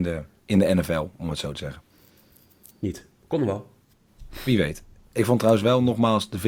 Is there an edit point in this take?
no; 0 cuts

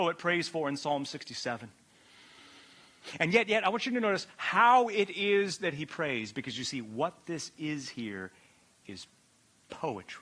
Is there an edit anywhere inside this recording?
no; 0 cuts

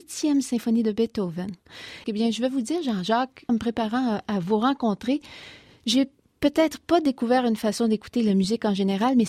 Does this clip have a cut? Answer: yes; 2 cuts; at 2.0 s, 3.5 s

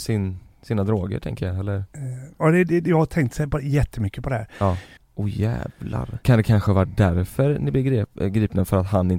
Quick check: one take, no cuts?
no; 2 cuts; at 5.0 s, 6.2 s

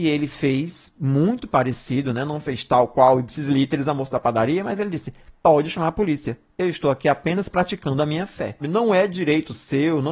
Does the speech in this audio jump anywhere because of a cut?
yes; 1 cut; at 8.6 s

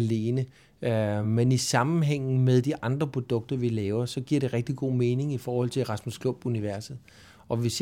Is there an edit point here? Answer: no; 0 cuts

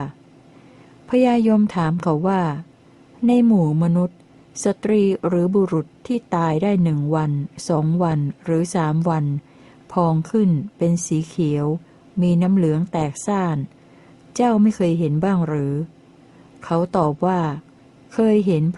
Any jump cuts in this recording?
no; 0 cuts

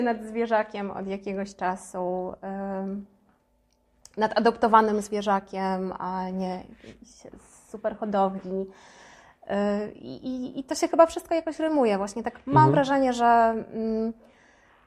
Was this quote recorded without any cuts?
yes; 0 cuts

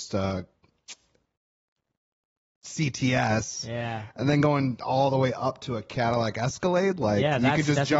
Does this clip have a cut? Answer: no; 0 cuts

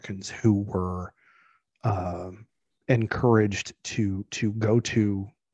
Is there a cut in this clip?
no; 0 cuts

